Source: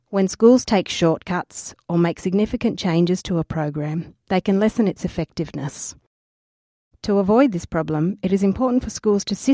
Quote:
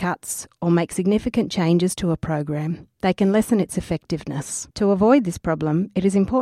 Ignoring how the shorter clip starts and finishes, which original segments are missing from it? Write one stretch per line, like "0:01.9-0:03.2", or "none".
0:06.0-0:07.0

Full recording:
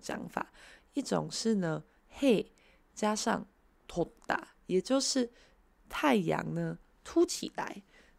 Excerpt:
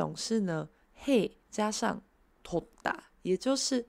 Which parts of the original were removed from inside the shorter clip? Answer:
0:02.5-0:02.8

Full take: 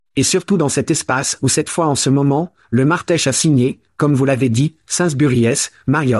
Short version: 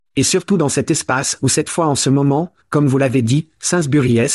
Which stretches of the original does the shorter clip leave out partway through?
0:02.6-0:03.9

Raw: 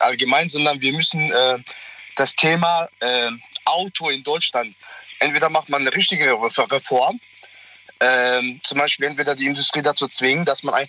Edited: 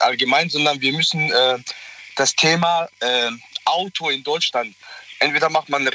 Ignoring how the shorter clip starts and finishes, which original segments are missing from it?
none

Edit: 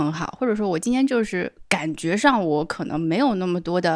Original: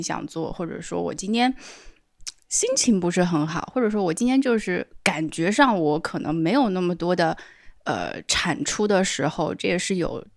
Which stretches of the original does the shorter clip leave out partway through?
none

